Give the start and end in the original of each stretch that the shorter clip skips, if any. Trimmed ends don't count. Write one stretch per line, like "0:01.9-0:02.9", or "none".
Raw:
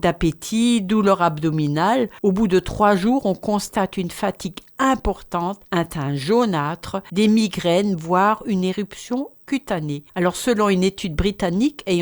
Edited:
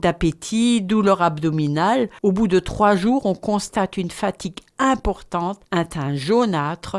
none